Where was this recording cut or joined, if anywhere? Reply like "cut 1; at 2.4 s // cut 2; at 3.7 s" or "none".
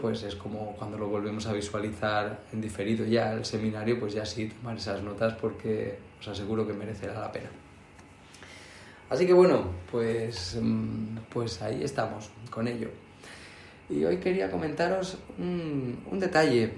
cut 1; at 13.9 s